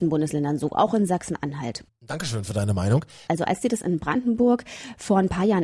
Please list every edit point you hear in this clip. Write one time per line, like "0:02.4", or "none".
0:01.9
0:03.3

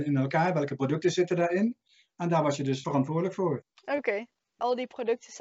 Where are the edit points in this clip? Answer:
none

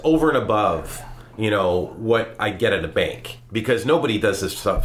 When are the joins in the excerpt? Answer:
none

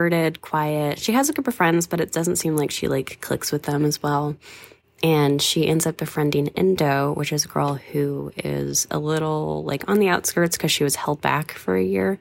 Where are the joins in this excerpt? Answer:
none

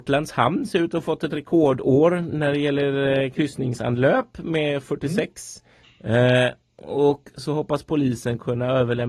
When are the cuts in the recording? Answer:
0:05.8

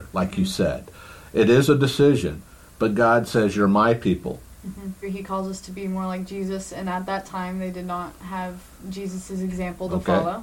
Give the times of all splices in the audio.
0:05.0

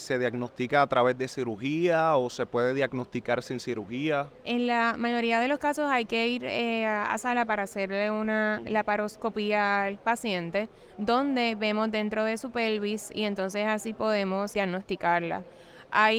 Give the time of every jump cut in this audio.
0:04.4
0:14.5

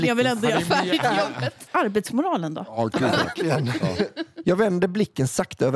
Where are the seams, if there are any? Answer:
0:01.7
0:04.4

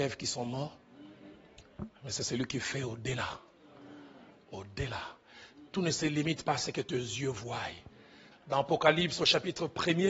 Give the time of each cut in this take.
0:08.3

